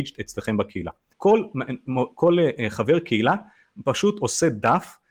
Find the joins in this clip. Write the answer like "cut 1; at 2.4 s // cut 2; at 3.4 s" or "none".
cut 1; at 1.1 s

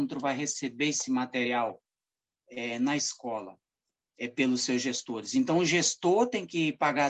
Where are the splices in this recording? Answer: none

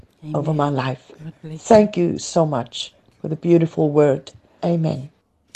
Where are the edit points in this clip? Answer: cut 1; at 4.6 s

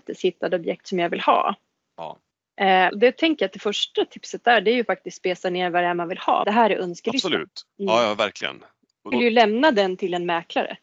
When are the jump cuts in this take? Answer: cut 1; at 2.9 s // cut 2; at 6.4 s // cut 3; at 9.1 s

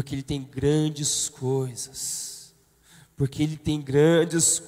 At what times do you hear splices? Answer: none

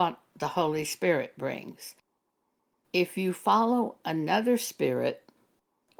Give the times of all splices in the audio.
none

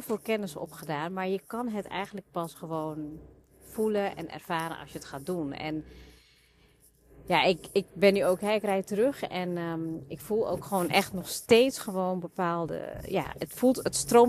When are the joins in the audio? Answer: none

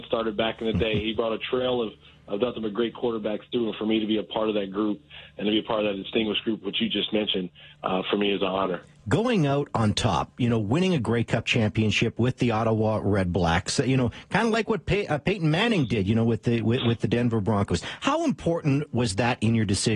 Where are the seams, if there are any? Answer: none

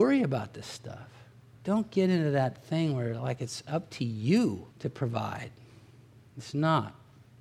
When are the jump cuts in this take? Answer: cut 1; at 1.5 s // cut 2; at 4.7 s

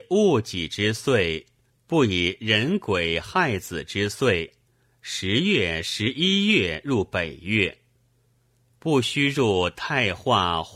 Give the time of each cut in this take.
cut 1; at 1.7 s

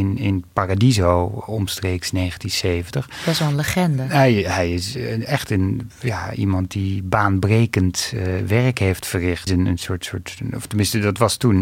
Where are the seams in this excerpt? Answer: cut 1; at 9.5 s

